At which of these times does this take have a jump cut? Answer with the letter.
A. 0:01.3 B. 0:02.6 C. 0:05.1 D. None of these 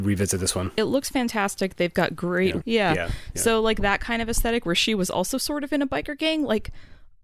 B